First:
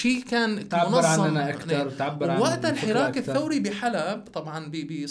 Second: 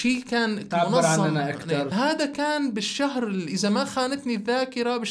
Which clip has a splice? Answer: second; 1 cut; at 1.9 s

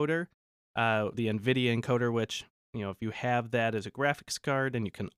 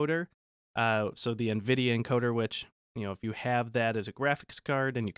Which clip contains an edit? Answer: first; 1 cut; at 1.1 s

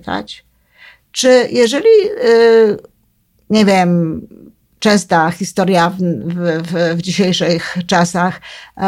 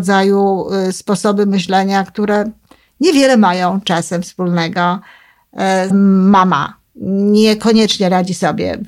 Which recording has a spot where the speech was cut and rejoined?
second; 1 cut; at 5.9 s

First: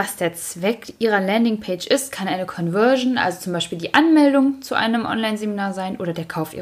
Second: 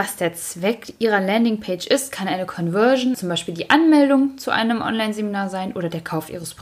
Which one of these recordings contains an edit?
second; 1 cut; at 3.1 s

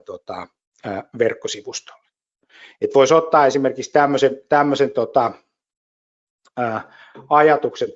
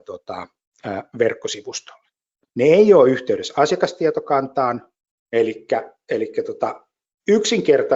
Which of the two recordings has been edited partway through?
second; 2 cuts; at 2.4 s, 5.1 s

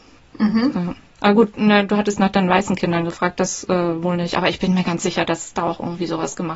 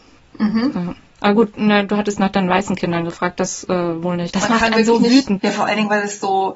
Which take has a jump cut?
second; 2 cuts; at 4.3 s, 5.4 s

